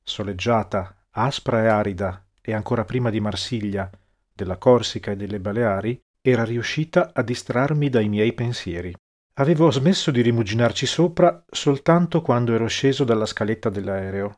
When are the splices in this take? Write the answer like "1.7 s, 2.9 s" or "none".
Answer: 9.2 s